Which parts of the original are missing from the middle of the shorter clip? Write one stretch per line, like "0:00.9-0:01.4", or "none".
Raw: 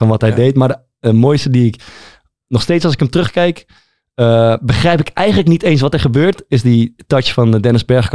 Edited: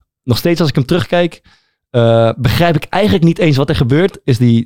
none